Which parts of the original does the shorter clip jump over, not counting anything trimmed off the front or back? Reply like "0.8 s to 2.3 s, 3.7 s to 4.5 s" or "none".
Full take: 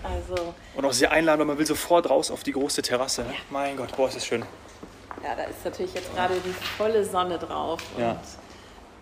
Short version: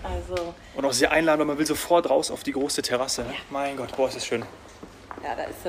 none